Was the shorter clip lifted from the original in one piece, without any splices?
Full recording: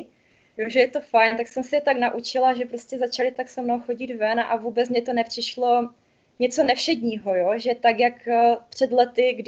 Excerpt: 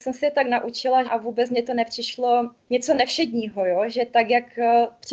no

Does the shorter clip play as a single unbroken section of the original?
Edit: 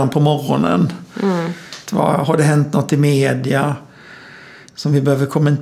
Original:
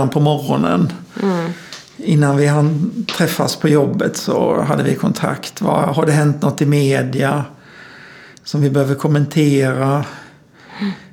no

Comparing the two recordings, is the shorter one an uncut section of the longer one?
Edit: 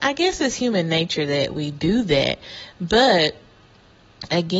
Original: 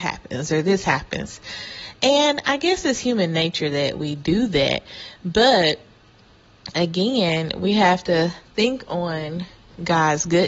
yes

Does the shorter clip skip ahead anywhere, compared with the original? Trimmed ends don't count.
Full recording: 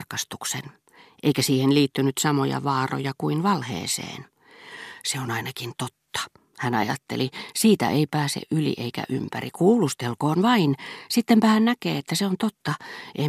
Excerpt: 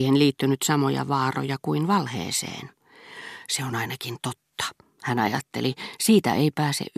no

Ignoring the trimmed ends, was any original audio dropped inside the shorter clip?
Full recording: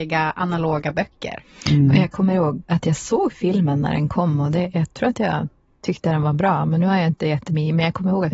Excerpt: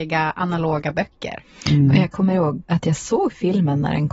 no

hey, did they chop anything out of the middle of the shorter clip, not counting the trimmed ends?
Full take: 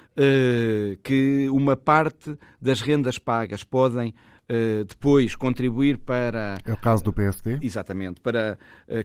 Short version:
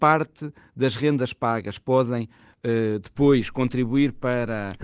no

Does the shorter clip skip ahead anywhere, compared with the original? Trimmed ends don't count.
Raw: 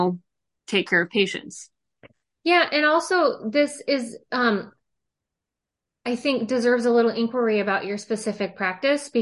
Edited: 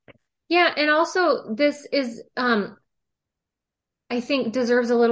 no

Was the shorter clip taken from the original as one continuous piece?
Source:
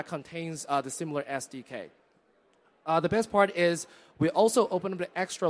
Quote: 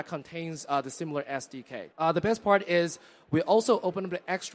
no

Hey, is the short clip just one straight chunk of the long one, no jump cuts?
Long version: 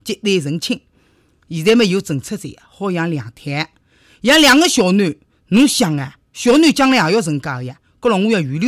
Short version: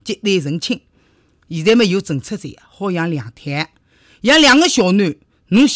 yes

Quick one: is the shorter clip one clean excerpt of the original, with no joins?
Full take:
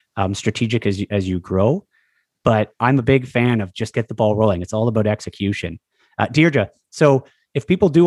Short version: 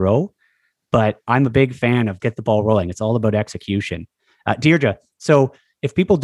no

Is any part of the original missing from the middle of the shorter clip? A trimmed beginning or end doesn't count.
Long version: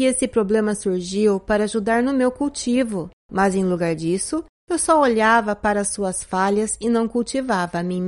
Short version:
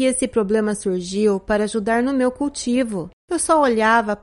yes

